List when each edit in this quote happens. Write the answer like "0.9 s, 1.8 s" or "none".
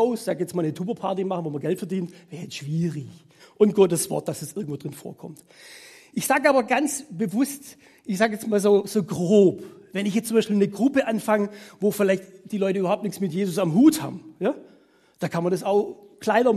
3.4 s